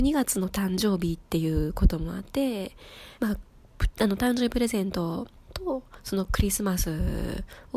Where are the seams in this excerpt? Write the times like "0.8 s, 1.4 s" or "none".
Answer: 3.2 s